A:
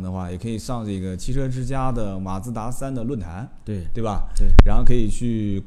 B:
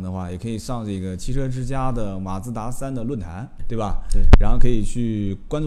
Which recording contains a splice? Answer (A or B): B